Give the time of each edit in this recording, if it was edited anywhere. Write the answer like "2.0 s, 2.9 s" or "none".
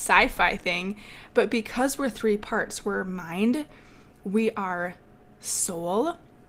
none